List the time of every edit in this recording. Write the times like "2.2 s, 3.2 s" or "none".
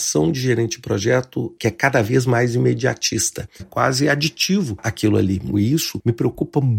3.6 s, 5.5 s